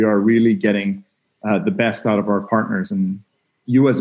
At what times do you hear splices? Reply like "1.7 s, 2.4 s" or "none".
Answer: none